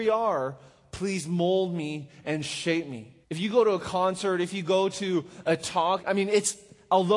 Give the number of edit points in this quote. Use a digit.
2